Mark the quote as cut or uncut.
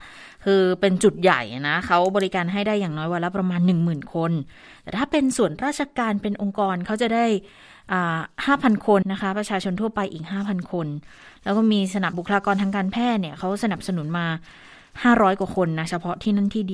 cut